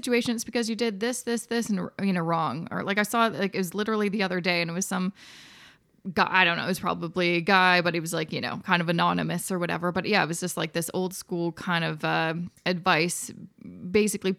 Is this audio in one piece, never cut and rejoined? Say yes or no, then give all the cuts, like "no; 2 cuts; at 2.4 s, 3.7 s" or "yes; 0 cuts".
yes; 0 cuts